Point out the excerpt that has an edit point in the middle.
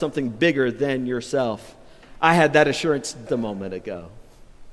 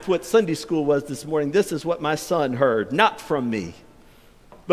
first; 1 cut; at 3.3 s

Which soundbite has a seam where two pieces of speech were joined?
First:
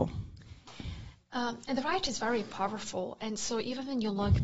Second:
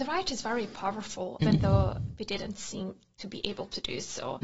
second; 1 cut; at 1.4 s

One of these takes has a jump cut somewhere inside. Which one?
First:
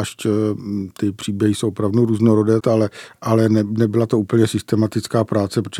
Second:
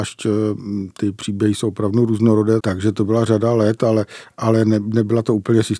first; 1 cut; at 2.6 s

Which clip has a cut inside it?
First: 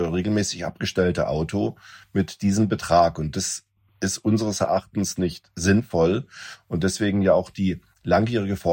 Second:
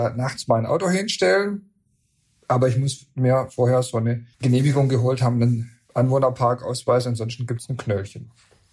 second; 2 cuts; at 4.3 s, 5.8 s

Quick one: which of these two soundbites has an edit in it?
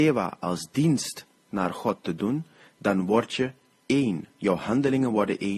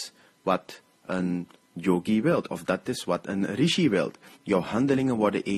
second; 1 cut; at 4.4 s

